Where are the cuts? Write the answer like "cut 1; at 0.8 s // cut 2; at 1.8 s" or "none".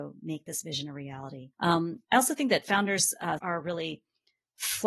cut 1; at 1.5 s // cut 2; at 3.4 s